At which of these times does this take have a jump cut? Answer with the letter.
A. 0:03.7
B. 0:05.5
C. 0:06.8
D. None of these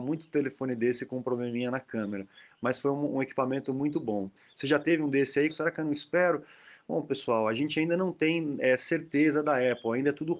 B